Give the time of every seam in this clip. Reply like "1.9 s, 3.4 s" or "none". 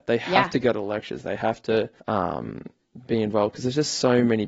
2.0 s